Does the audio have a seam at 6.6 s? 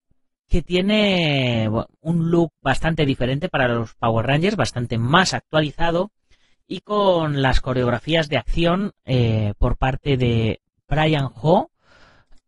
no; 1 cut; at 1.9 s

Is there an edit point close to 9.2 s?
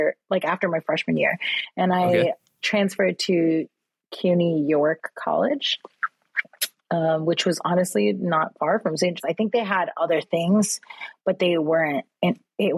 yes; 1 cut; at 9.2 s

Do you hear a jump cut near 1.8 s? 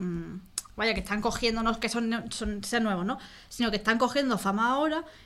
no; 0 cuts

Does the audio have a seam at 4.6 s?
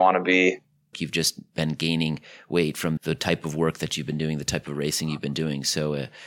no; 2 cuts; at 0.9 s, 3.0 s

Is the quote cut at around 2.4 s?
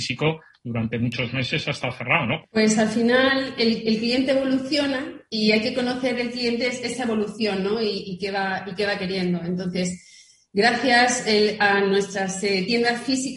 yes; 1 cut; at 2.4 s

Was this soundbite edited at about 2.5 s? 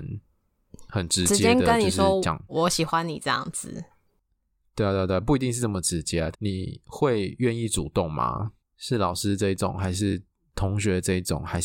yes; 3 cuts; at 2.5 s, 6.3 s, 8.6 s

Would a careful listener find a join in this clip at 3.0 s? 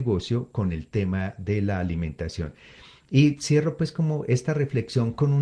no; 0 cuts

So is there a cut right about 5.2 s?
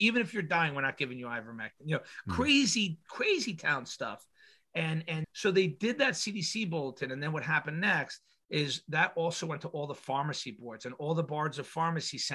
yes; 1 cut; at 5.2 s

